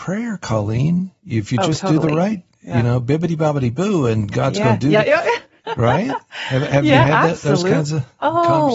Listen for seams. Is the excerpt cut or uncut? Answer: uncut